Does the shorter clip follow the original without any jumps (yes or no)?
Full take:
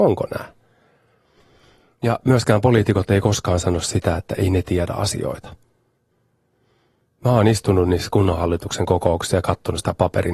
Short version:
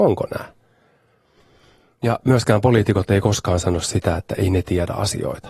yes